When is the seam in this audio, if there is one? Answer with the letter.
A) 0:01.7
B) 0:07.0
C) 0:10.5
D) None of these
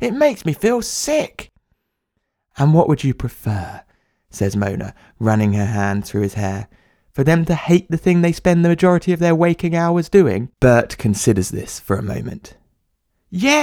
C